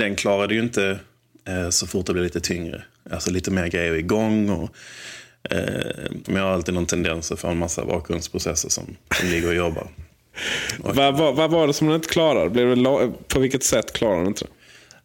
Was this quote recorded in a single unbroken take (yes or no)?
no